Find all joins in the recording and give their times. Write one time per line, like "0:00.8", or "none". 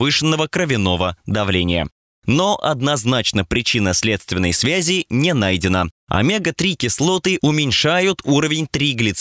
0:02.1
0:06.0

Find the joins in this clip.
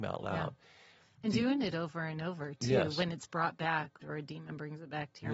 0:04.0

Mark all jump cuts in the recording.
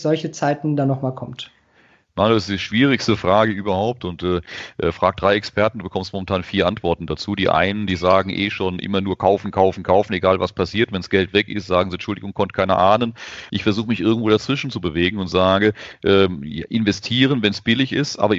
0:13.5

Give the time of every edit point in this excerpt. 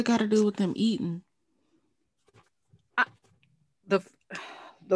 none

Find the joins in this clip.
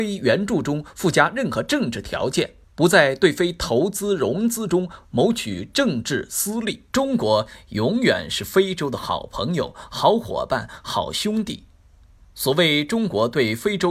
0:02.6
0:06.9

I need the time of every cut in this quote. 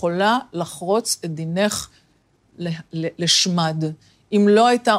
none

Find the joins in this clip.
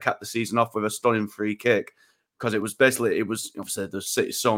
none

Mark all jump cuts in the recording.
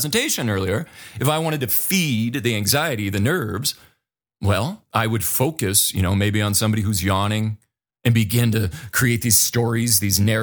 0:04.9
0:07.9

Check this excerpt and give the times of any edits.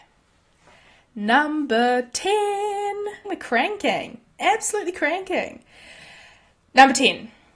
0:03.2

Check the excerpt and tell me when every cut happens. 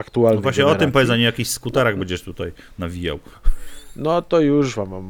none

